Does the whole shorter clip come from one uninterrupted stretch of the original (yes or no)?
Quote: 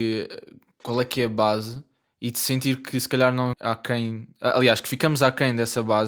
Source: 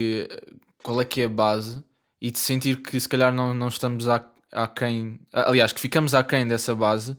no